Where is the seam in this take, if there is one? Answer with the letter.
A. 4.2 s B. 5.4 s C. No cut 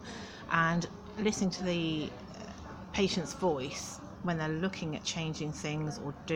A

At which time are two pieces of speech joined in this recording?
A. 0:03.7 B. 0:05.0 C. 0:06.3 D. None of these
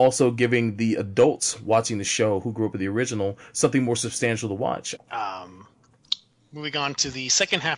B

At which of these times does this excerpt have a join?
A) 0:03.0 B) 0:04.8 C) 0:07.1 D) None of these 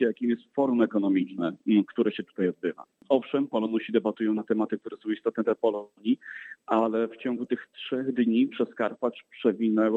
D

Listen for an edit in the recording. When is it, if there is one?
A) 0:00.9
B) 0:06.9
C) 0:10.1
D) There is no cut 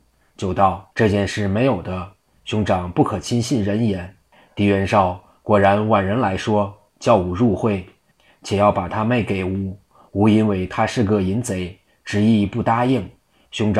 A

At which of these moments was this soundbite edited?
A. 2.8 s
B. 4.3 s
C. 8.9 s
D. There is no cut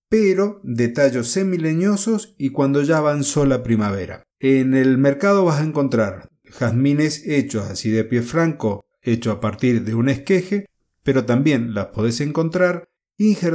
B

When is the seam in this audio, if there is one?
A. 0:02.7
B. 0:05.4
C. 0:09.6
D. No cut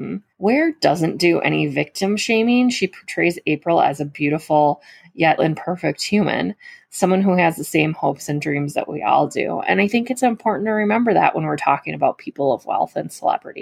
B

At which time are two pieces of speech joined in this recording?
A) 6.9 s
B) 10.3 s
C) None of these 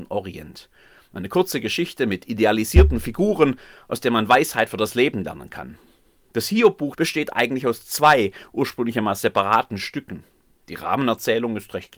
A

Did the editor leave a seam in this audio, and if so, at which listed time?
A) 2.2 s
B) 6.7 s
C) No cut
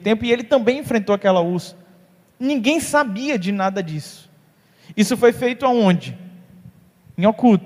C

